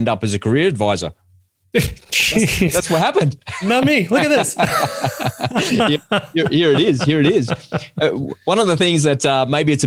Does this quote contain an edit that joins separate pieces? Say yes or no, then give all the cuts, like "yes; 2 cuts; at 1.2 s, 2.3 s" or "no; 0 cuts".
no; 0 cuts